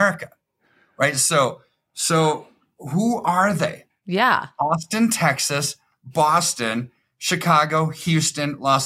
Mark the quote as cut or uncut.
uncut